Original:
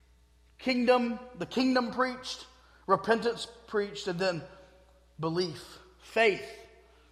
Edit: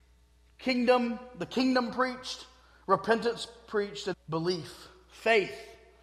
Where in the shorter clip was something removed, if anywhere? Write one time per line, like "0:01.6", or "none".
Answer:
0:04.1